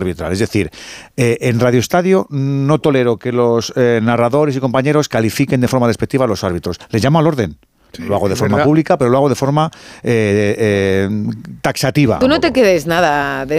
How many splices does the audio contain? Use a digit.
1